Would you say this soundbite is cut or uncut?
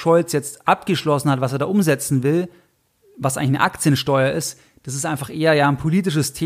uncut